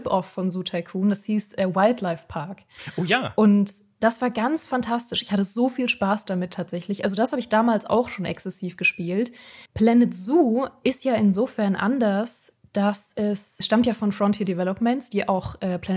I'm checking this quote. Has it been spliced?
yes; 2 cuts; at 9.7 s, 13.6 s

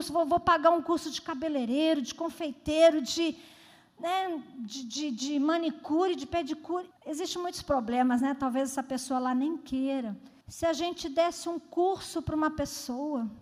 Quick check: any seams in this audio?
yes; 2 cuts; at 6.9 s, 10.4 s

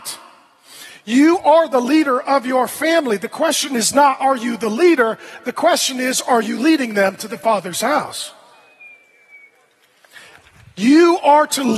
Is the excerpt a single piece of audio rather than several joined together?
yes; 0 cuts

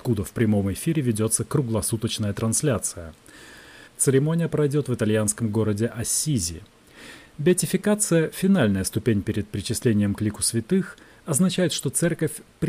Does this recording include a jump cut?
yes; 1 cut; at 3.9 s

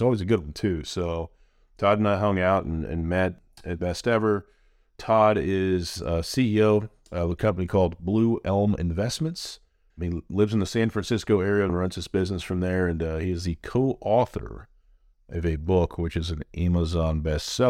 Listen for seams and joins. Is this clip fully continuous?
no; 2 cuts; at 9.9 s, 11.7 s

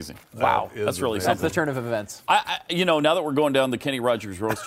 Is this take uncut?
yes; 0 cuts

